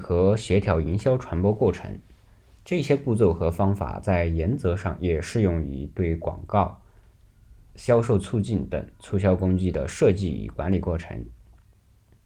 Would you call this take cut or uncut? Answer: uncut